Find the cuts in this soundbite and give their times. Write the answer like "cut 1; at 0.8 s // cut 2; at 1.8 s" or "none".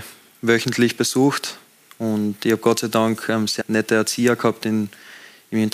cut 1; at 3.6 s